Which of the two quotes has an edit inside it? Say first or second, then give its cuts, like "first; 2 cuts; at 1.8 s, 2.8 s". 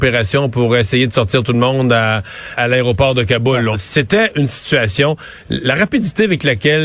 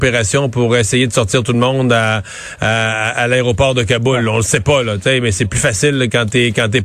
first; 2 cuts; at 2.6 s, 3.7 s